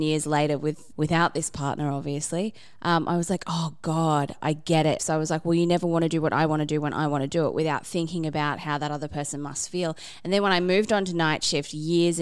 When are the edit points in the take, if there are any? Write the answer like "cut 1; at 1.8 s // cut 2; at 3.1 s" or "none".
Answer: cut 1; at 0.9 s // cut 2; at 5.0 s